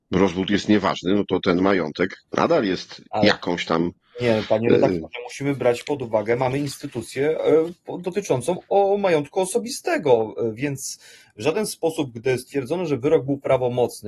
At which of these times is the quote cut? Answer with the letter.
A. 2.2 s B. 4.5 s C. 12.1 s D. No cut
A